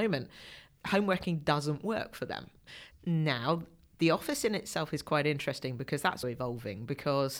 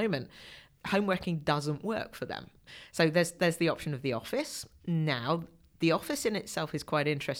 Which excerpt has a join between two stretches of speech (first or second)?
first